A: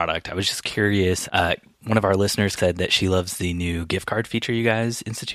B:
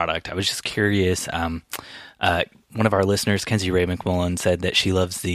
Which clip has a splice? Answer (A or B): A